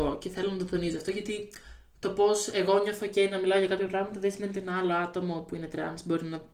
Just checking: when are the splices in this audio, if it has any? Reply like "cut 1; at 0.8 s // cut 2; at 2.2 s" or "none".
none